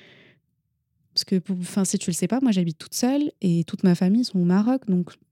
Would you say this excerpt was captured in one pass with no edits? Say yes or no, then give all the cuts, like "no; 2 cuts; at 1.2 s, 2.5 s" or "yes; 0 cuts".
no; 1 cut; at 1.0 s